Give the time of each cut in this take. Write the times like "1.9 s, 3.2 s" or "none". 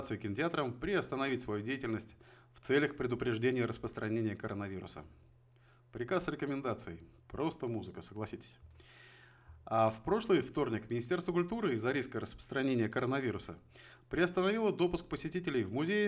none